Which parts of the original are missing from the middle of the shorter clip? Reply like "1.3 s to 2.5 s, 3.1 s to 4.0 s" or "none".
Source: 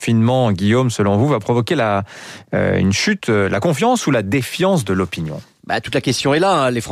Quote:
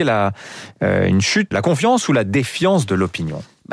3.2 s to 3.5 s